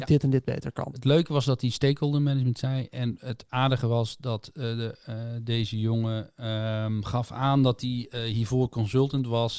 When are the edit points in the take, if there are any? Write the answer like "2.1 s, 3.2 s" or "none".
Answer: none